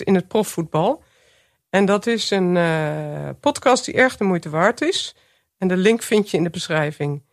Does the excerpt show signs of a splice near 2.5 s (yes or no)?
no